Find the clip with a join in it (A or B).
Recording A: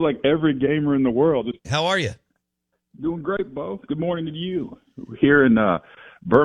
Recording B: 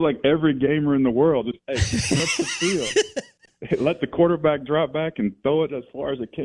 A